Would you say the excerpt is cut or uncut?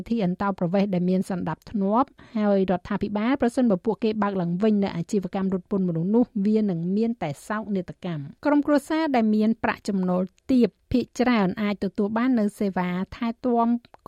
cut